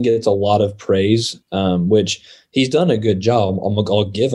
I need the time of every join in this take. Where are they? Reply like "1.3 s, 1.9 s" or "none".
none